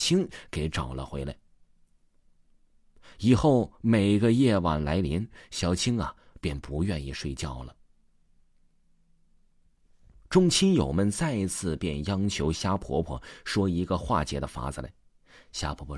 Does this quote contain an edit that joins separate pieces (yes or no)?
no